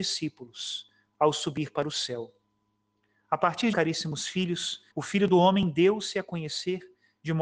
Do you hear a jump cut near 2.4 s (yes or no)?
no